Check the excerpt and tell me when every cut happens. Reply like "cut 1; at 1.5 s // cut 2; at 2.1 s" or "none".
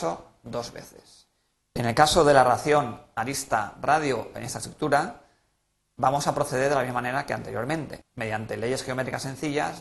cut 1; at 1.6 s // cut 2; at 8.0 s